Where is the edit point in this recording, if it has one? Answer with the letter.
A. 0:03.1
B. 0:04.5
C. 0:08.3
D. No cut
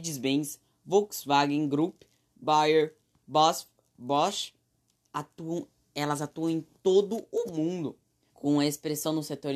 C